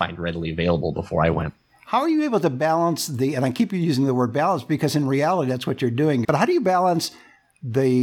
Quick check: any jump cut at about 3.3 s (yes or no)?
no